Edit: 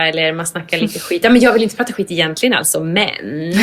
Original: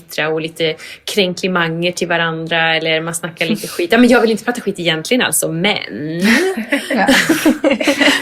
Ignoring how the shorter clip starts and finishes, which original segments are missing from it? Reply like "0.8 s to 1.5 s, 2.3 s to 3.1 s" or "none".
none